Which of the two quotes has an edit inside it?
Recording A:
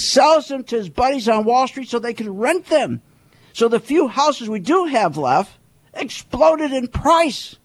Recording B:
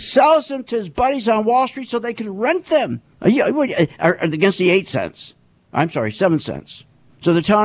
B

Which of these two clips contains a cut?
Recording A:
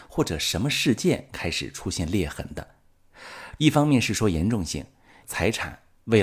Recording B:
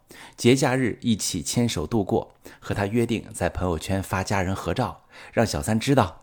A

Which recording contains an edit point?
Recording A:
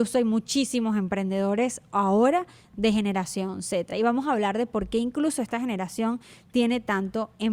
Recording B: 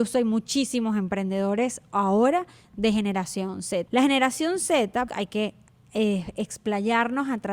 B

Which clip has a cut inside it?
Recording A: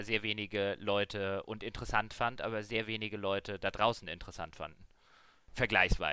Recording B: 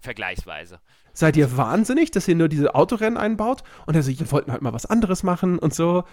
B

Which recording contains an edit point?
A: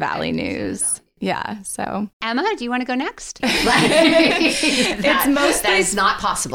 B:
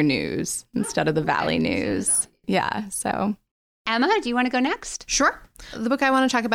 A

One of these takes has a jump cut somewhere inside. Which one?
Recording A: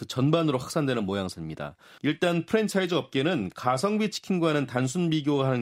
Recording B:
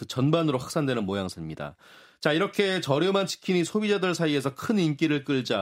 A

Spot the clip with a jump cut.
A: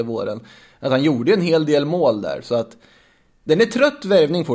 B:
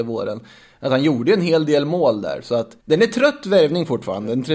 B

